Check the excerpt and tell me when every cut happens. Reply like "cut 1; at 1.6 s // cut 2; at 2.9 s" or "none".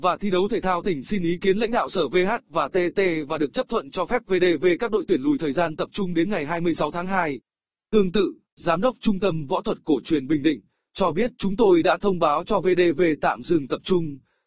cut 1; at 8.4 s // cut 2; at 11.3 s